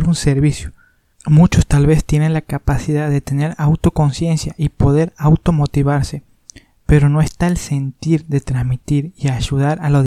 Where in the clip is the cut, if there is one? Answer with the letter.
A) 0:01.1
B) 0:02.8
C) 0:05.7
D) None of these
D